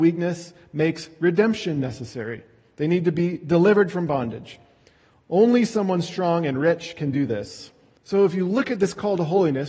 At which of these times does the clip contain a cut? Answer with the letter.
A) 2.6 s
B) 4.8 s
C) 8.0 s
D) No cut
C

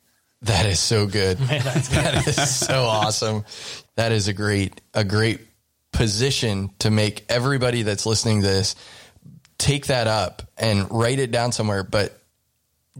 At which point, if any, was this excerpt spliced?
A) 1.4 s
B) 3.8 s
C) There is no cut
B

